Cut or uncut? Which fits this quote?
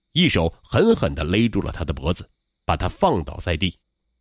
uncut